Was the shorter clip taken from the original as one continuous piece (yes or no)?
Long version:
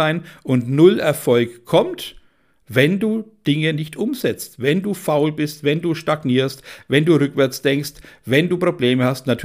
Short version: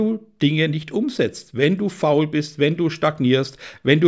yes